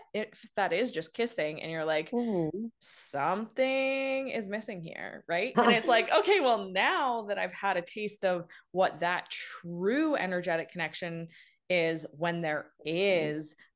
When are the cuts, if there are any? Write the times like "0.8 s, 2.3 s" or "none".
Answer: 5.5 s